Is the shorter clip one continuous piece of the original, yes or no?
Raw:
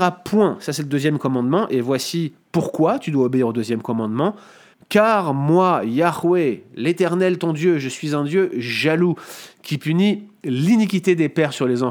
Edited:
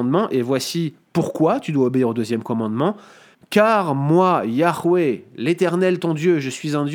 yes